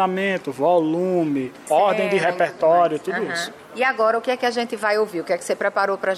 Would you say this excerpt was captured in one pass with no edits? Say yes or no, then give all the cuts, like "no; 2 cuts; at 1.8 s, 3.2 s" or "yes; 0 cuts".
yes; 0 cuts